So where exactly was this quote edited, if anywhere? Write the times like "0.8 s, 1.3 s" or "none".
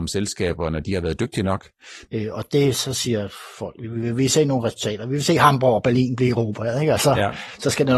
2.1 s

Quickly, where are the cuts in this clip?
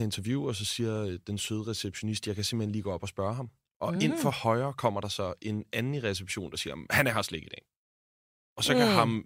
none

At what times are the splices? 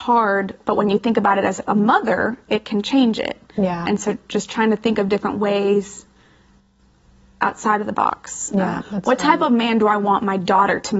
3.9 s, 8.8 s

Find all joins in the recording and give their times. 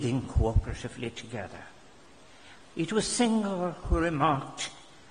2.6 s

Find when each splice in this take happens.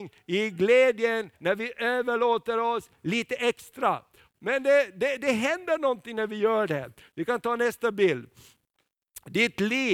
1.3 s, 4.3 s

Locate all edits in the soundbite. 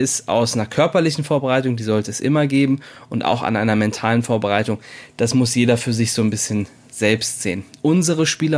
none

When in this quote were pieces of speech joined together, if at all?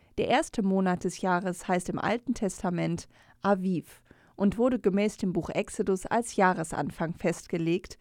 none

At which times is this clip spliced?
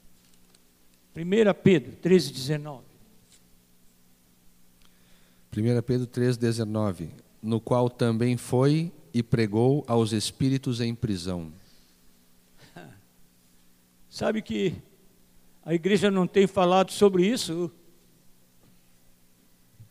16.9 s

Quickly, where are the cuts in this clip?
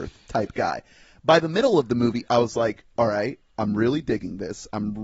none

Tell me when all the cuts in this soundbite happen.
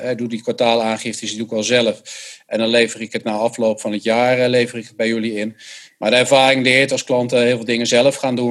none

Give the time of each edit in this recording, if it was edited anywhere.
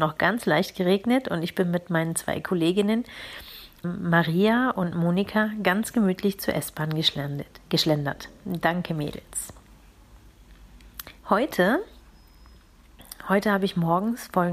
3.8 s, 11.2 s

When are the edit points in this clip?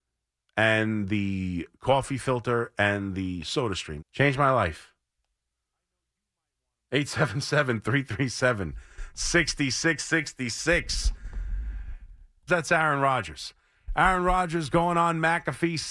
4.0 s, 12.5 s

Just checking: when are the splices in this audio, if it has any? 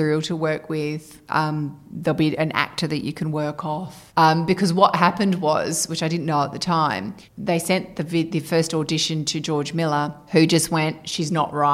4.1 s

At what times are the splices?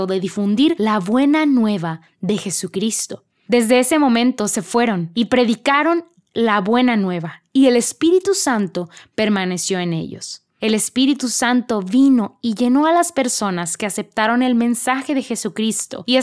3.5 s

